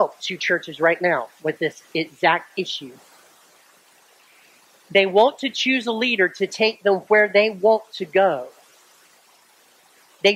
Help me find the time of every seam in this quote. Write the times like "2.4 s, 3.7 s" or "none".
none